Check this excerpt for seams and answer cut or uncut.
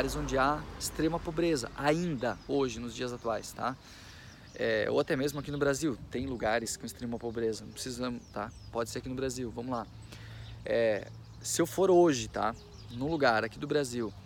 cut